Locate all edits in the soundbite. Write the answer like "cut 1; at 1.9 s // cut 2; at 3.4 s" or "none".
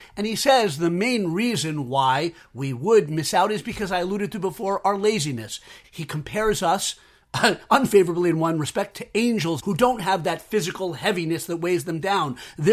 cut 1; at 5.8 s // cut 2; at 9.6 s